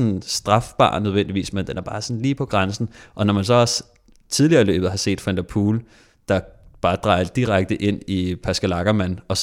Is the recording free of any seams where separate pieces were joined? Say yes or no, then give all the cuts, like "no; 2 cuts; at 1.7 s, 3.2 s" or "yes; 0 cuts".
yes; 0 cuts